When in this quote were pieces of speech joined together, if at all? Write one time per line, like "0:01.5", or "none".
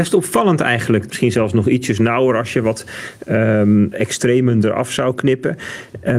0:01.1
0:03.9